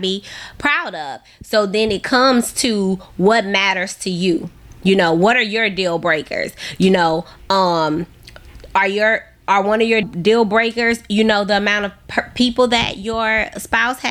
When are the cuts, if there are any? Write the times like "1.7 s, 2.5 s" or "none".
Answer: 10.0 s